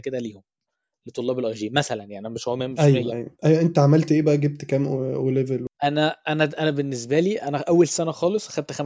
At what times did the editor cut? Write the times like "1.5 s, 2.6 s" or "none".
3.4 s